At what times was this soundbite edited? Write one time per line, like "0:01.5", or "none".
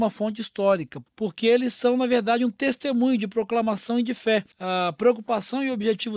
0:01.1
0:04.5